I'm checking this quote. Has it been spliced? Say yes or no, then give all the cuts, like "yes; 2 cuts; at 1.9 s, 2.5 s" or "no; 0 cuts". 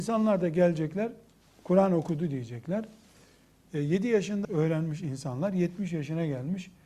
yes; 1 cut; at 4.4 s